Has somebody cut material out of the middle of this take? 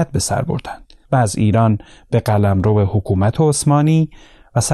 yes; 1 cut; at 1.0 s

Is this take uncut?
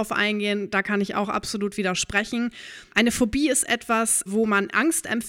no; 2 cuts; at 2.9 s, 4.3 s

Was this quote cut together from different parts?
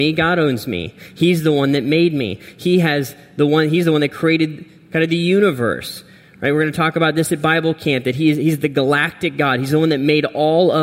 no; 0 cuts

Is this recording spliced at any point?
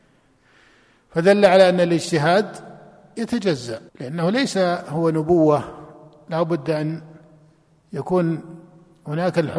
yes; 1 cut; at 3.9 s

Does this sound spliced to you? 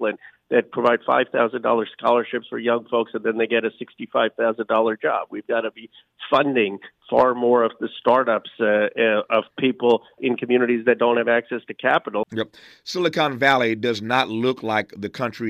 yes; 2 cuts; at 10.2 s, 12.2 s

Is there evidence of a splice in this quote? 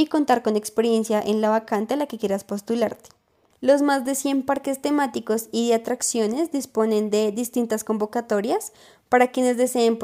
yes; 1 cut; at 3.5 s

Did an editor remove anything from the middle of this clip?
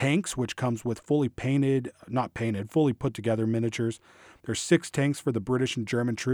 yes; 1 cut; at 4.4 s

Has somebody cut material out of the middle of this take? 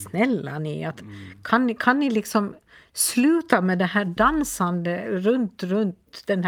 no; 0 cuts

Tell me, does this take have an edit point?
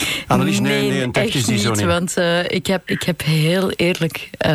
yes; 1 cut; at 2.9 s

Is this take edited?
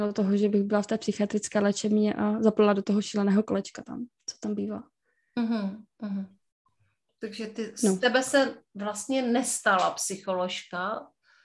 no; 0 cuts

